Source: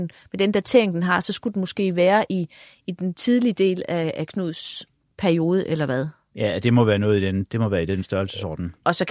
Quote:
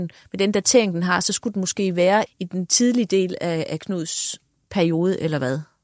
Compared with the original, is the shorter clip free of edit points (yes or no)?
no